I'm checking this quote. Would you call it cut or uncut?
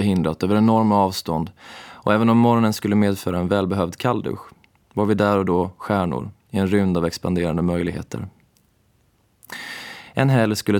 uncut